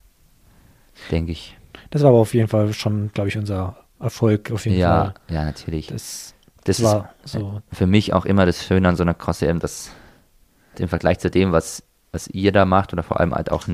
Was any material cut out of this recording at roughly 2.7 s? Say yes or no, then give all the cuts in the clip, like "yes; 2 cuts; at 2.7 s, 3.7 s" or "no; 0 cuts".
no; 1 cut; at 10.7 s